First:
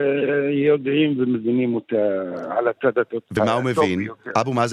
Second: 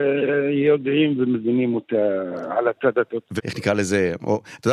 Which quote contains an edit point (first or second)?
second